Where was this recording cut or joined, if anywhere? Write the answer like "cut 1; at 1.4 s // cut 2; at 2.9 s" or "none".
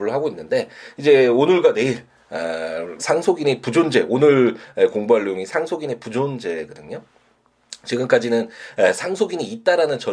cut 1; at 3.0 s